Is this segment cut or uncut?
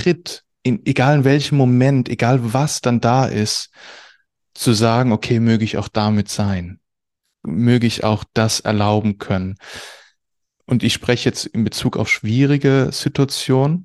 uncut